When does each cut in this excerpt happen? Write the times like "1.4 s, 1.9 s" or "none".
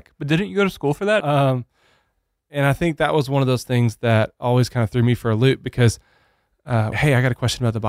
1.2 s, 6.9 s